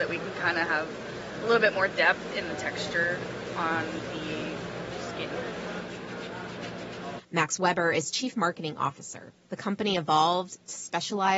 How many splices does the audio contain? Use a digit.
2